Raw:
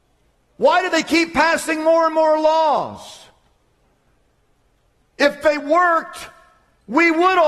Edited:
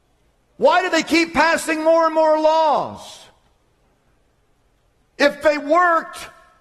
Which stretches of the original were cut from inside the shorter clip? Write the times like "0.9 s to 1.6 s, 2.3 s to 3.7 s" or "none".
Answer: none